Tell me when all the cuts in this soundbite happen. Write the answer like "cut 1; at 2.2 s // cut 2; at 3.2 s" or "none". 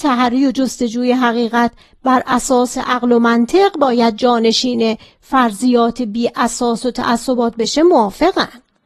none